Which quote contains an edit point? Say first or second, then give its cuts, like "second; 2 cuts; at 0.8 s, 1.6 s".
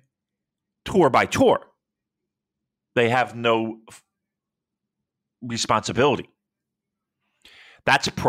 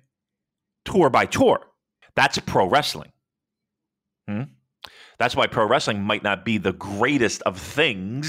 second; 1 cut; at 2.0 s